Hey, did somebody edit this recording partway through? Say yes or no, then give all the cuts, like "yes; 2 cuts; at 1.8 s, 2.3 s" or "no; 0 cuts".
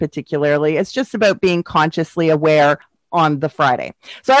no; 0 cuts